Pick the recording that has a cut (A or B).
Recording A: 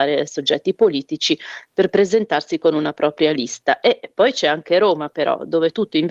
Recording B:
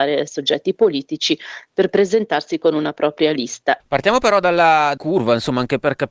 B